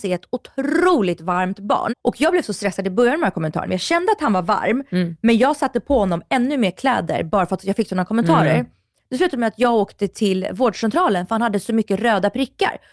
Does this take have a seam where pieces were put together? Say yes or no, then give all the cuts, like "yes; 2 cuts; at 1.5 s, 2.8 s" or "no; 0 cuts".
yes; 2 cuts; at 1.9 s, 3.7 s